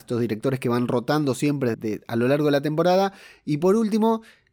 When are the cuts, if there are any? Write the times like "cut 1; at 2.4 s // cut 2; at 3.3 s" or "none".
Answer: cut 1; at 1.7 s